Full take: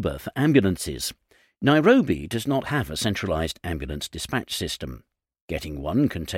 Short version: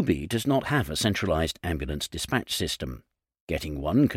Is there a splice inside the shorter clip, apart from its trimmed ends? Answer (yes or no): no